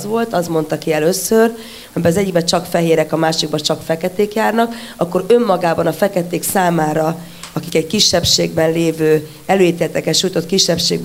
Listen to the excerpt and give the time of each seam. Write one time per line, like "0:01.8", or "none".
0:01.9